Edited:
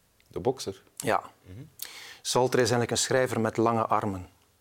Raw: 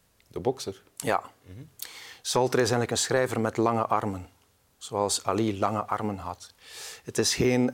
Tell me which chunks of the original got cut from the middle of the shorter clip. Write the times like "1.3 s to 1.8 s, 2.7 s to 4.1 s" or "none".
none